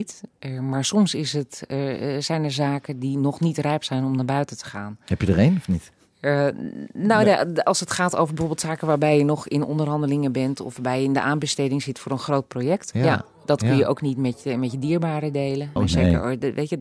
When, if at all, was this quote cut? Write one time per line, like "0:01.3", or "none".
0:12.9
0:15.8